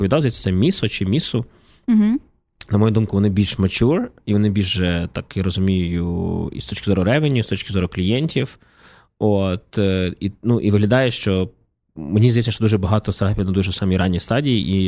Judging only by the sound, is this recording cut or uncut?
uncut